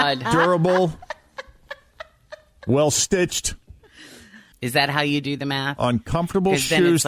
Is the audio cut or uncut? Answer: cut